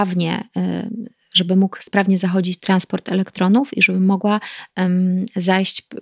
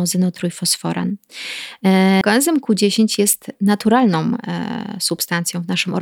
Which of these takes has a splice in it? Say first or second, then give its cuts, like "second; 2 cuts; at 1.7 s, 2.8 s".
second; 1 cut; at 2.2 s